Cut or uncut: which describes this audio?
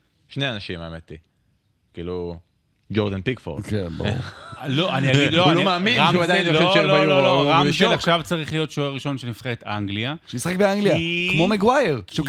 uncut